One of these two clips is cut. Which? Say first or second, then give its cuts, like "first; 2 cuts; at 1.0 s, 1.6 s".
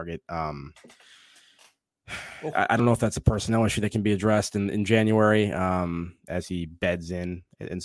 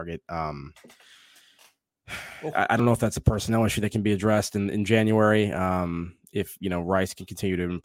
first; 1 cut; at 6.3 s